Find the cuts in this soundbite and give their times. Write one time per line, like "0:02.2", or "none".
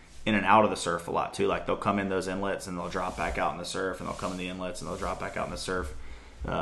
none